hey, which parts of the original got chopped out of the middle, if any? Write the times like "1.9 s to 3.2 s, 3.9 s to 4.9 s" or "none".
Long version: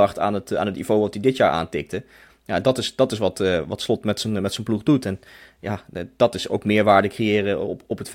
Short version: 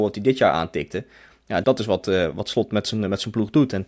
2.6 s to 3.0 s